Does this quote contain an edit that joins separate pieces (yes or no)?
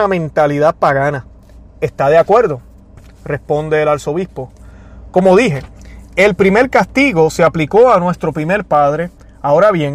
no